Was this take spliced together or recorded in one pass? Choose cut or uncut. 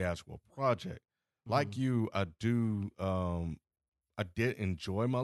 uncut